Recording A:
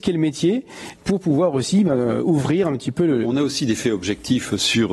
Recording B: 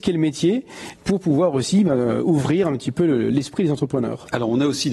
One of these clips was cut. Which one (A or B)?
A